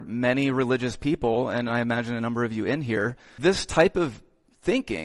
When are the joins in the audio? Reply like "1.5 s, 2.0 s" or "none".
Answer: 3.4 s